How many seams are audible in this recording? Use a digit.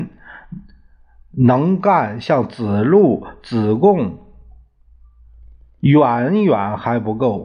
0